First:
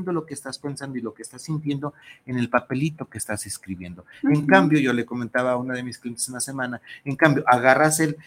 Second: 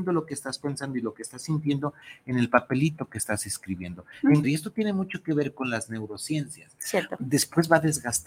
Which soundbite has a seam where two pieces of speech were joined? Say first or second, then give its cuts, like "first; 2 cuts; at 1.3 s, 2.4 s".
second; 2 cuts; at 4.4 s, 7.2 s